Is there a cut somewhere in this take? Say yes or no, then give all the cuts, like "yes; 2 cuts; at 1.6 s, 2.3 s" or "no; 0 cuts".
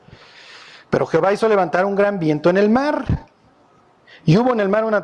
no; 0 cuts